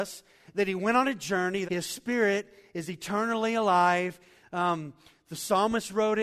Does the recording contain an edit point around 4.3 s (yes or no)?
no